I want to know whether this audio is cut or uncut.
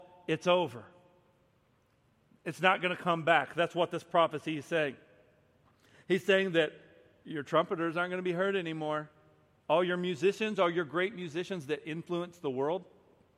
uncut